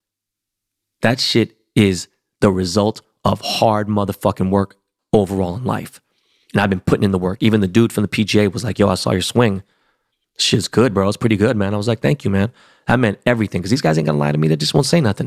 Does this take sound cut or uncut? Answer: uncut